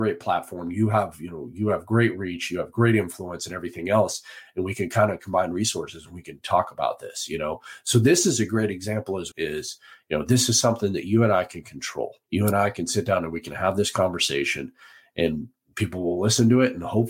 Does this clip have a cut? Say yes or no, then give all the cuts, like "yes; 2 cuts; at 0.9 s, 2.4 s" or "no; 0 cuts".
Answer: yes; 2 cuts; at 9.3 s, 12.2 s